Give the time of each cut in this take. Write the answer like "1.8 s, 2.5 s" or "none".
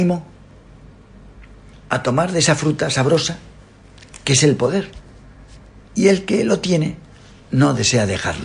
5.8 s